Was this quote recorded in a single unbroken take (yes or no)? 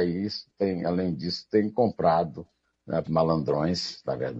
no